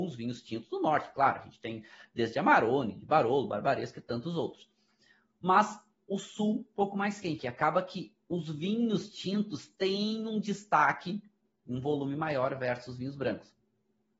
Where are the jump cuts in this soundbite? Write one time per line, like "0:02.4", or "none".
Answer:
0:07.4